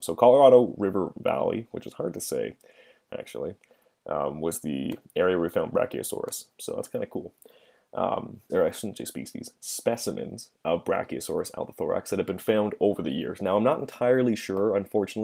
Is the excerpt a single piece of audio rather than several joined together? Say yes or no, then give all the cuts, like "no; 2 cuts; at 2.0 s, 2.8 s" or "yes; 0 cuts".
no; 2 cuts; at 6.5 s, 8.5 s